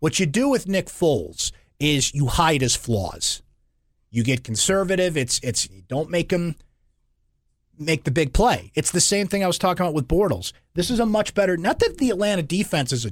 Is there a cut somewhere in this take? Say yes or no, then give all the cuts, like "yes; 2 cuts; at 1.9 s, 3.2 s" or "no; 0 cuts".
no; 0 cuts